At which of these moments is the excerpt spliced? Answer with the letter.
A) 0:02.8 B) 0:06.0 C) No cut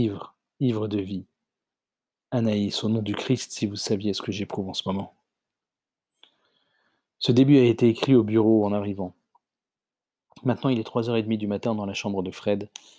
C